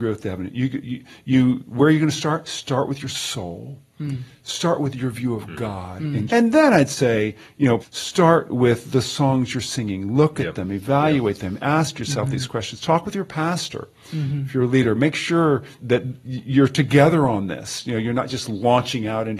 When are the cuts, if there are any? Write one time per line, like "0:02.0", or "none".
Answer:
0:06.3
0:07.8
0:15.8